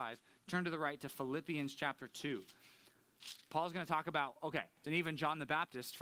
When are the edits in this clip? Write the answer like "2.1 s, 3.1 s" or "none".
4.8 s